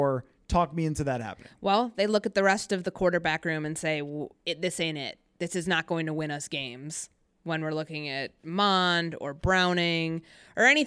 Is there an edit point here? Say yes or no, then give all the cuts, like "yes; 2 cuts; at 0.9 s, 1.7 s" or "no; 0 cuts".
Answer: no; 0 cuts